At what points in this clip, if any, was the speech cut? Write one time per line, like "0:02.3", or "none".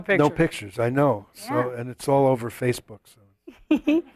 none